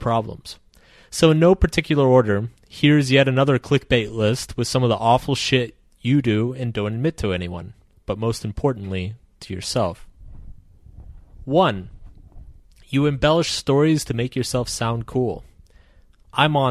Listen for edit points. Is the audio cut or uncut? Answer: uncut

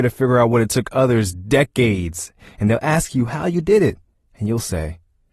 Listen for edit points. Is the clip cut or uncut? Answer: cut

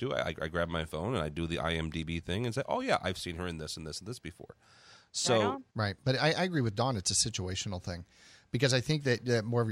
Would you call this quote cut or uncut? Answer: cut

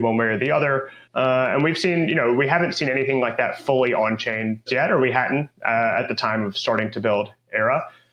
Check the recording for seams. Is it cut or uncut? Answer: cut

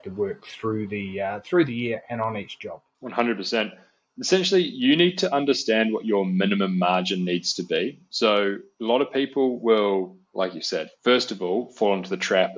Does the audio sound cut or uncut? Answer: uncut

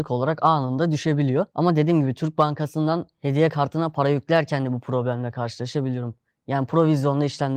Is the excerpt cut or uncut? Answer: uncut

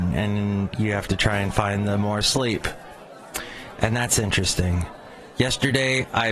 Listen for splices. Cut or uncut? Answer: uncut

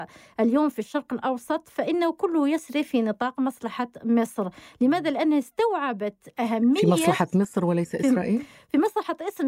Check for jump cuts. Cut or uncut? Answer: uncut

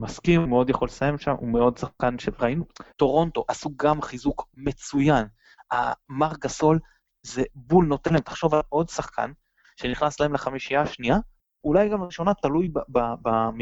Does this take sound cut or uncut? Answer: cut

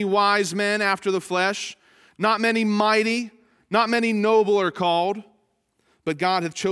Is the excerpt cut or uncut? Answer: uncut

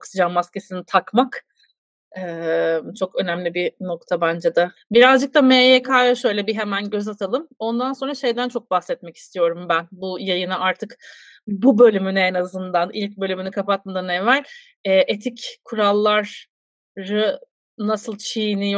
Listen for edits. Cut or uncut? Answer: cut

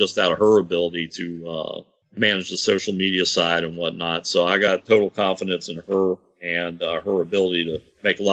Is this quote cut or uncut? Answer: uncut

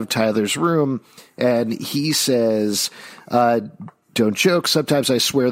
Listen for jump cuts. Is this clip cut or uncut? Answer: uncut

